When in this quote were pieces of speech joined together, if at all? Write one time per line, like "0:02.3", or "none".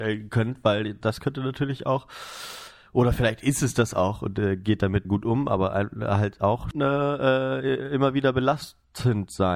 0:05.0
0:06.7